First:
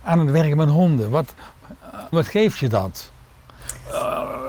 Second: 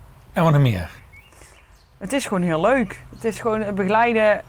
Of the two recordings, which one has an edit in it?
first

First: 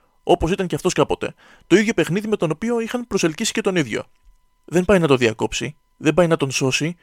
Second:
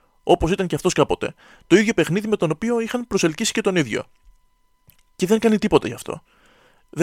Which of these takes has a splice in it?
first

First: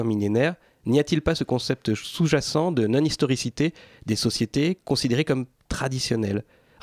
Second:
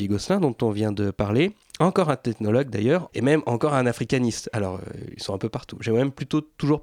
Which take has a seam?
second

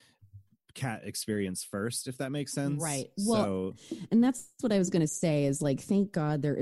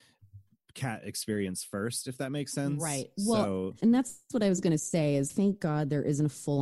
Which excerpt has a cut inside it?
second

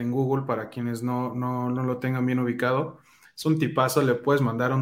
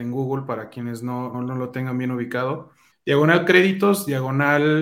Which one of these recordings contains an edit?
second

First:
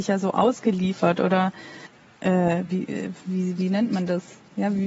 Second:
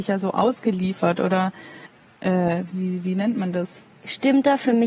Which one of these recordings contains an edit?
second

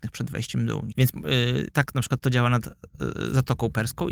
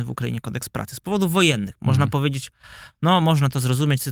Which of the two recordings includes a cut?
first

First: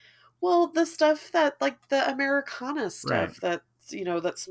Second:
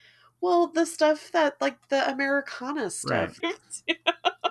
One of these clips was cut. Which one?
second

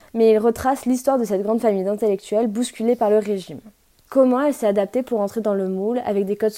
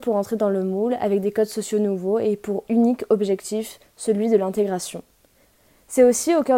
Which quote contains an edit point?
first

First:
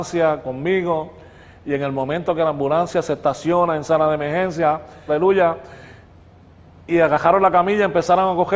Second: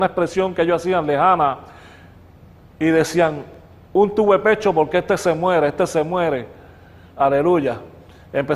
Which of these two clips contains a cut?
first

